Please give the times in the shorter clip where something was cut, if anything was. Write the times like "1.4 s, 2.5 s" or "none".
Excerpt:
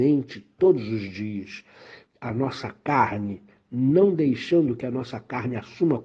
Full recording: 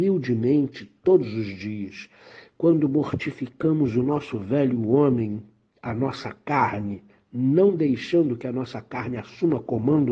2.1 s